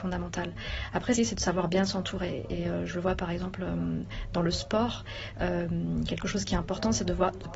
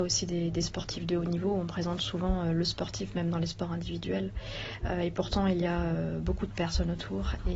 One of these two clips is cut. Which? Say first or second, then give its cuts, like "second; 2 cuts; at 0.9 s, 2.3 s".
first; 1 cut; at 1.2 s